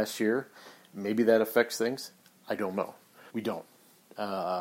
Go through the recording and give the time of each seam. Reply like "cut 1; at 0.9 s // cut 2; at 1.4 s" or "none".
cut 1; at 3.3 s